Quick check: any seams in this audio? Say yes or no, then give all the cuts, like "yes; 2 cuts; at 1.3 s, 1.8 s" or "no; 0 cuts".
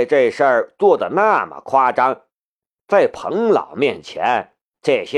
no; 0 cuts